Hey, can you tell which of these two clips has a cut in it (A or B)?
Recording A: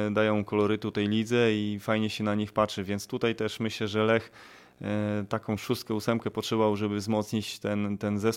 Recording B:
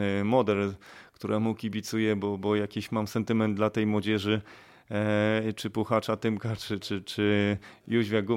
B